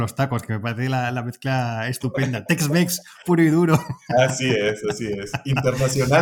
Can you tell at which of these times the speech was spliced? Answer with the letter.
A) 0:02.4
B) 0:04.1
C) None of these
C